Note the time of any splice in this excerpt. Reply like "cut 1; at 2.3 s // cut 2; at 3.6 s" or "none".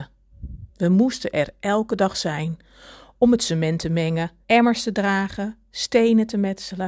cut 1; at 4.4 s